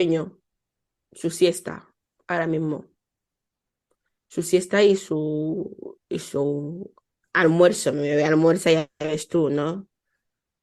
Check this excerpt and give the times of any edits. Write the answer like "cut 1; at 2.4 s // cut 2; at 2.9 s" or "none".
none